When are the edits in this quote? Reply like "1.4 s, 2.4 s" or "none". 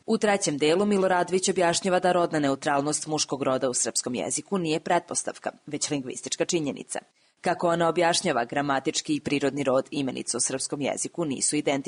none